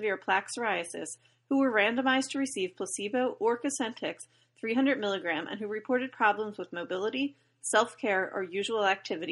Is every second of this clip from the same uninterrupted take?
yes; 0 cuts

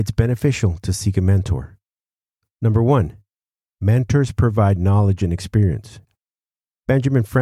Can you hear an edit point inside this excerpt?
no; 0 cuts

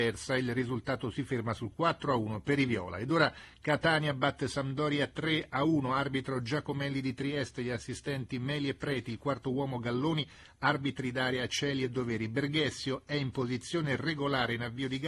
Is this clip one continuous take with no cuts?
yes; 0 cuts

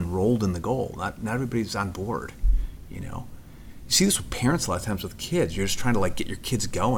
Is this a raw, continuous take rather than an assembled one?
yes; 0 cuts

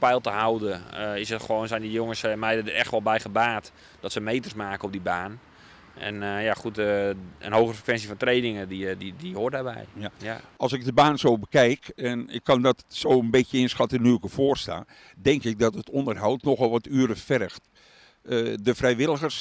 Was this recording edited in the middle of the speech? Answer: no; 0 cuts

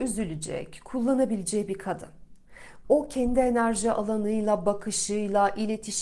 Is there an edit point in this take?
yes; 1 cut; at 2.8 s

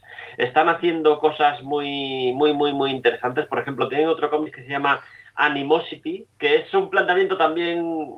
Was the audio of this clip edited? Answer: yes; 1 cut; at 6.3 s

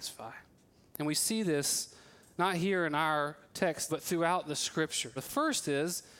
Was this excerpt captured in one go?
no; 2 cuts; at 3.9 s, 5.2 s

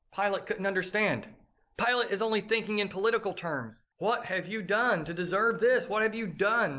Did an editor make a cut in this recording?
yes; 1 cut; at 3.9 s

